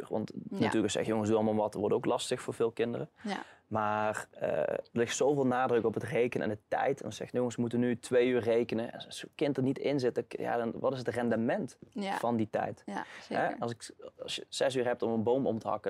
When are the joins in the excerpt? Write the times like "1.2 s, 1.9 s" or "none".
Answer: 4.9 s